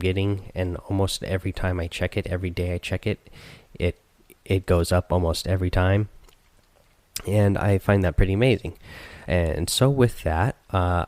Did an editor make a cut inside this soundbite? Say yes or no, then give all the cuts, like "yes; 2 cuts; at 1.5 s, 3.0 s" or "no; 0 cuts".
no; 0 cuts